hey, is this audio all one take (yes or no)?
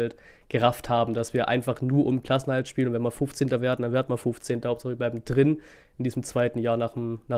yes